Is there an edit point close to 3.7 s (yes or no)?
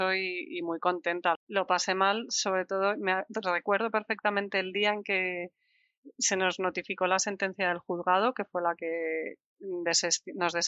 no